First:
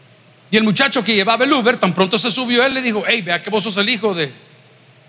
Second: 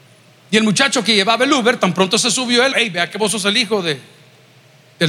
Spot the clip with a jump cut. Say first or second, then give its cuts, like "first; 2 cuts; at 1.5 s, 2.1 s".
second; 1 cut; at 2.7 s